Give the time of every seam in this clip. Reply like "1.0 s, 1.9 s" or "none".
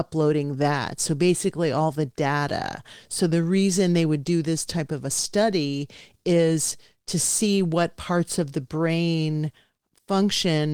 none

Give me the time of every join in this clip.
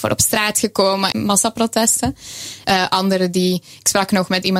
1.1 s, 2.6 s

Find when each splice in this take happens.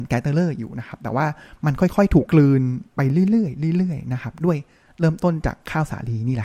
2.3 s

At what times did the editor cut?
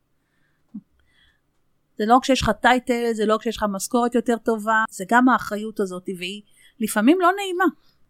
1.9 s, 4.9 s

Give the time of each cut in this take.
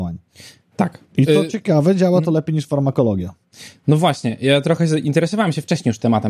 1.1 s

